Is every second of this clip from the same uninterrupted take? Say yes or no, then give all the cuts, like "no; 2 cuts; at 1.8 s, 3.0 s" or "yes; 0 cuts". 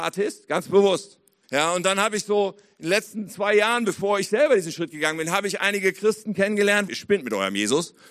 no; 2 cuts; at 1.4 s, 6.9 s